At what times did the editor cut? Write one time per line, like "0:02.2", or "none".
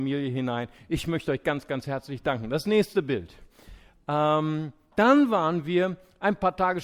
0:04.9